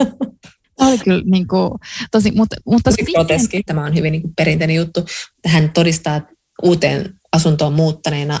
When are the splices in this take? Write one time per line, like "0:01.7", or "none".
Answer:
0:03.7
0:05.3